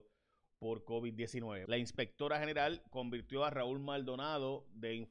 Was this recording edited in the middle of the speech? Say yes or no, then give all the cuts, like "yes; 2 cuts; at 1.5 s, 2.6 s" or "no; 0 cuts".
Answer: yes; 1 cut; at 1.7 s